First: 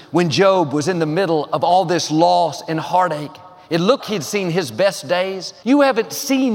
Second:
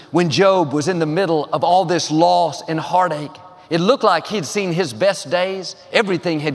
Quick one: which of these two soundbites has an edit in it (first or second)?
first